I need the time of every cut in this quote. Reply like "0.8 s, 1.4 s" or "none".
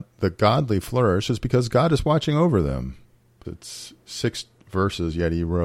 3.4 s